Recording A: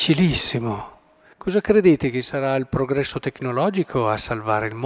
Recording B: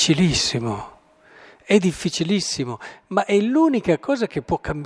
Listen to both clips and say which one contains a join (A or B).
A